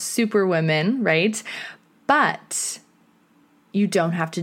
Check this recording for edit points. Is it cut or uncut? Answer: uncut